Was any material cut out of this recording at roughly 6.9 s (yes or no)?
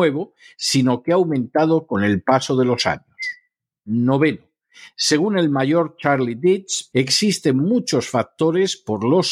yes